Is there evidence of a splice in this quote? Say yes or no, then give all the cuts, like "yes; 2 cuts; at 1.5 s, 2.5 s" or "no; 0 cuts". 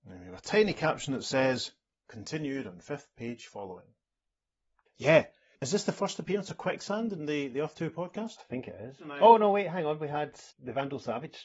yes; 1 cut; at 4.9 s